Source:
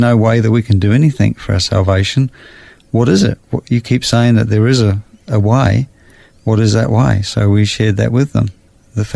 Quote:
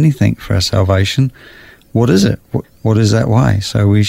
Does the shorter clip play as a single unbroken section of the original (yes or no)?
no